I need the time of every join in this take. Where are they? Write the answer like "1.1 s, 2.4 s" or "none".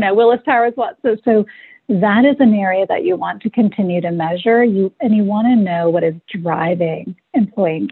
1.2 s